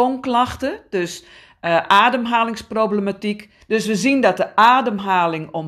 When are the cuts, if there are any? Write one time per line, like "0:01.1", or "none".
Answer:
0:03.6